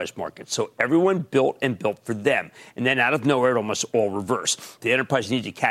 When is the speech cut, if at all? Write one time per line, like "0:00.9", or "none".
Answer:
0:04.8

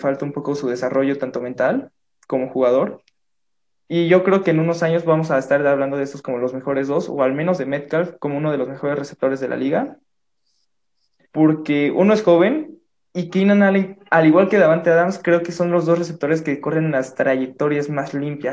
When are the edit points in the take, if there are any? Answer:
0:11.3

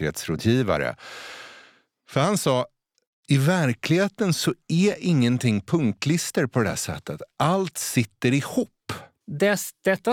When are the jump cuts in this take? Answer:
0:09.2

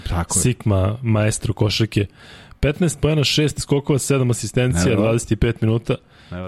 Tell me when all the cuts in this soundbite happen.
none

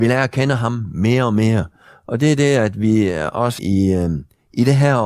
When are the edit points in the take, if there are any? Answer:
0:03.6

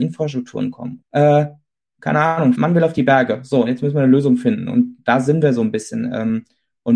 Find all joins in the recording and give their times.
0:01.0
0:02.6

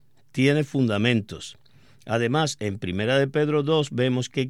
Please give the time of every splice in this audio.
0:02.0

